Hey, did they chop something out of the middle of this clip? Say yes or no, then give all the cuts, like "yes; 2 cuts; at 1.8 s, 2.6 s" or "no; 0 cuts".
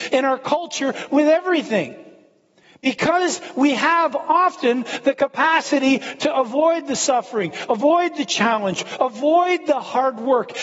no; 0 cuts